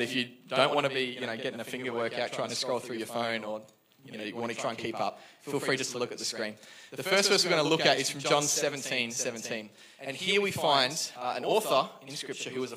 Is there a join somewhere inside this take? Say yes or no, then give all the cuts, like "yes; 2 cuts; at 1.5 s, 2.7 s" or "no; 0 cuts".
no; 0 cuts